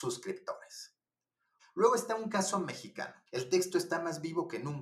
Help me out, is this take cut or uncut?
cut